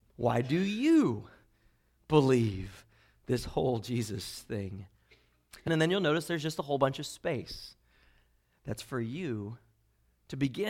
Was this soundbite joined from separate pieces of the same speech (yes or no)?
yes